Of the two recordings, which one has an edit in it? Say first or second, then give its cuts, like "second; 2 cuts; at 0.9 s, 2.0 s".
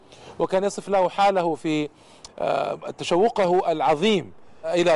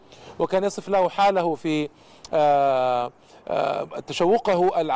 first; 1 cut; at 2.3 s